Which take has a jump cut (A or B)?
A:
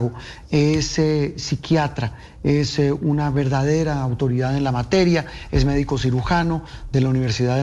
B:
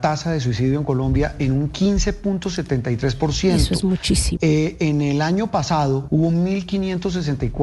B